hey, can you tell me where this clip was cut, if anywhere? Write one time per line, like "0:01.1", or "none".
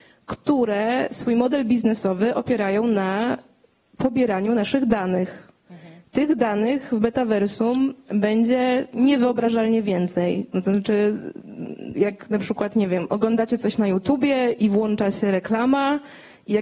0:10.5
0:11.9